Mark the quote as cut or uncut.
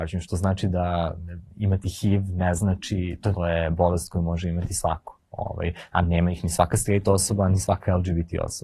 cut